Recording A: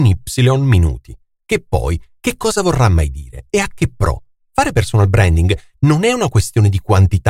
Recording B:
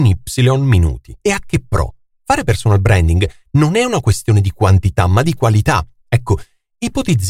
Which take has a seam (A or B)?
B